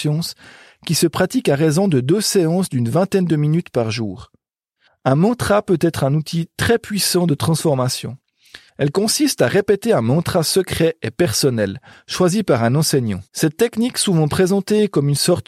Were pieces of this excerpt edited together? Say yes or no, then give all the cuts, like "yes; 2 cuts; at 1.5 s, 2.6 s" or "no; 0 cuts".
yes; 3 cuts; at 4.9 s, 8.7 s, 13.3 s